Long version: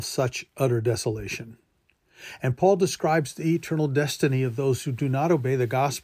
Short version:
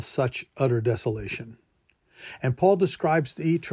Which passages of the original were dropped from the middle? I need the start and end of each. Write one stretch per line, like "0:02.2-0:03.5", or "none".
none